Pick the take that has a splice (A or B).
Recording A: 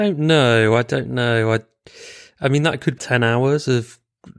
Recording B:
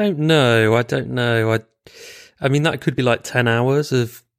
A